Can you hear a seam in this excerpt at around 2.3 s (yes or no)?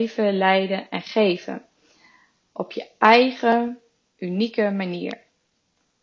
no